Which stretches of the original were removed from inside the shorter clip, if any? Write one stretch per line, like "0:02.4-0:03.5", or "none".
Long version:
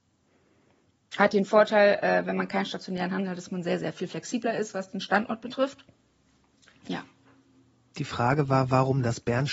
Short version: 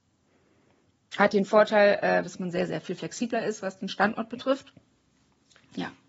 0:02.2-0:03.4

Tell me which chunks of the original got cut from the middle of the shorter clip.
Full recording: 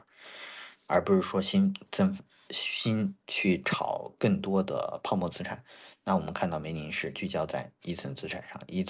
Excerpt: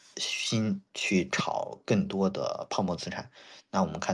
none

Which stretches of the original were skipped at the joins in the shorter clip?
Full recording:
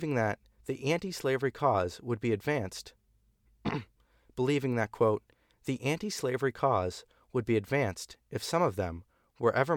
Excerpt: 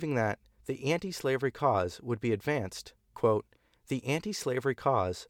0:03.1-0:04.9

